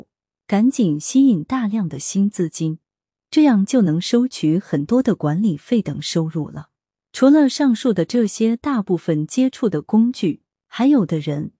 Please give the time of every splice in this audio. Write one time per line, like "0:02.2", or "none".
none